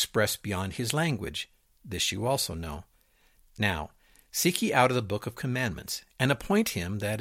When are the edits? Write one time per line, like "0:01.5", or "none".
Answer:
0:06.1